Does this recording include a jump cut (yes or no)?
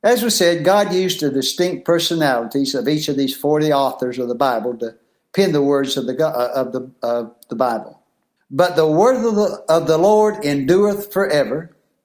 yes